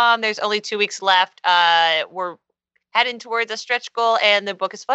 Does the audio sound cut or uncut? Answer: uncut